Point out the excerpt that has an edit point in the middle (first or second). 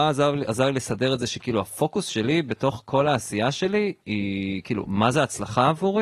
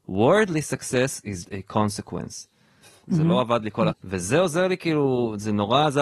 second